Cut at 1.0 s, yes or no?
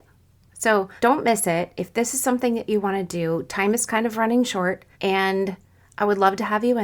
yes